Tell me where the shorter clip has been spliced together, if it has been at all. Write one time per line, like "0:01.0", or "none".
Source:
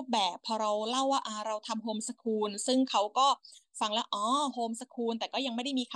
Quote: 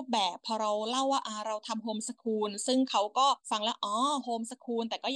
0:03.4